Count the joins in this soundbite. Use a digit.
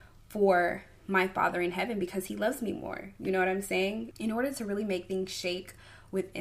1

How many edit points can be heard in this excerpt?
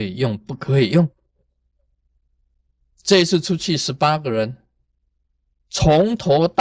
0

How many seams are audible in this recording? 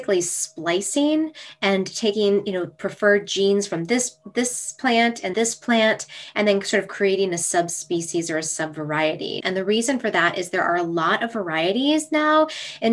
2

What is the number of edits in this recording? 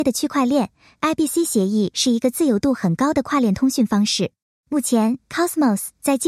1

